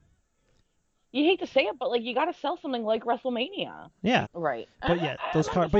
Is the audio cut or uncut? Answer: cut